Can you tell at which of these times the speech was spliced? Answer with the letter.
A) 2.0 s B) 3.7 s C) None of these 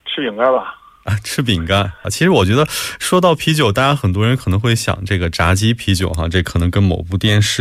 A